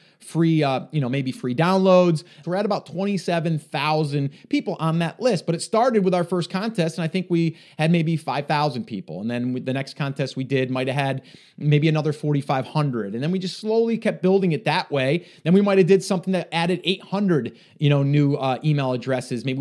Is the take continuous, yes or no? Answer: no